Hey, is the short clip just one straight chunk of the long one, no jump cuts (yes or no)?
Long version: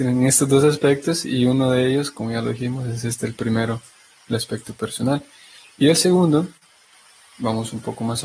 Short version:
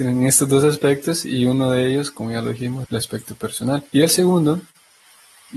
no